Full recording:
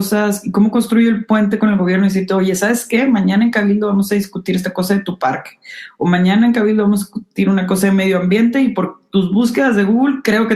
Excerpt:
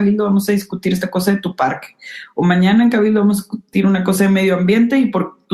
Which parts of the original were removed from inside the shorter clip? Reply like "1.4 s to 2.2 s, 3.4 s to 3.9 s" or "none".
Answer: none